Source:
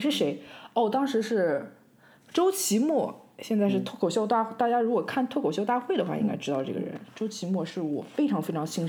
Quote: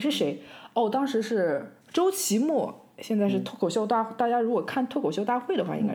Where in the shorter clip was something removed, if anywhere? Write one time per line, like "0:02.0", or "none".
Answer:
0:01.8

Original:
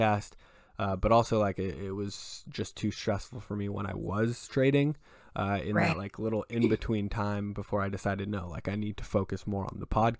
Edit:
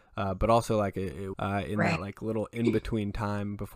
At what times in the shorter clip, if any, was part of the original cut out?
0:01.3

